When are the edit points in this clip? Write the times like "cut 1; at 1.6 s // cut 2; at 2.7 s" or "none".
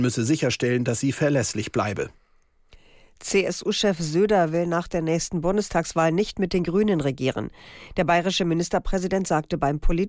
none